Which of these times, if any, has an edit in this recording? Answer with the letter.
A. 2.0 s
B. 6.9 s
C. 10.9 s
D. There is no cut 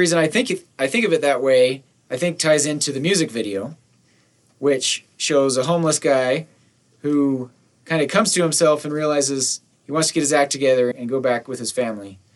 C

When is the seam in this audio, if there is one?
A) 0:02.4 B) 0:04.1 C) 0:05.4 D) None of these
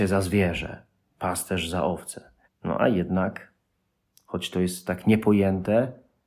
A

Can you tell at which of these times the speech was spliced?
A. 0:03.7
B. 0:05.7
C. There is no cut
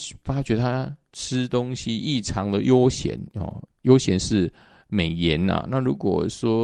C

